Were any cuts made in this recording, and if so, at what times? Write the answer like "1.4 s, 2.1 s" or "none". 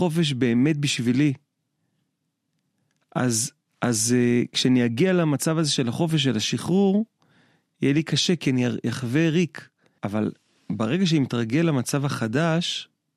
10.0 s